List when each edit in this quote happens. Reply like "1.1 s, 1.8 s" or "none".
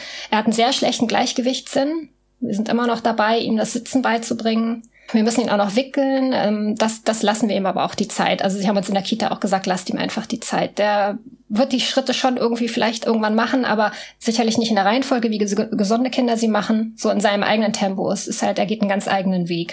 none